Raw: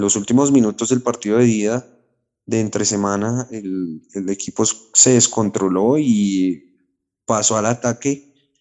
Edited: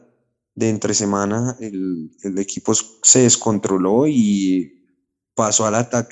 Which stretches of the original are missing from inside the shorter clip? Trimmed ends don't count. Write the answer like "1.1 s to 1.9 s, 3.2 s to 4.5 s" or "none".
none